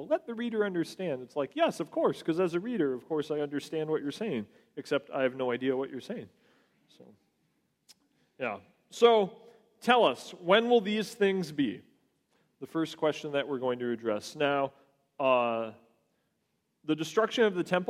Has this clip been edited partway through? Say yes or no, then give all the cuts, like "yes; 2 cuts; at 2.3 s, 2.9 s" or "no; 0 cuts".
no; 0 cuts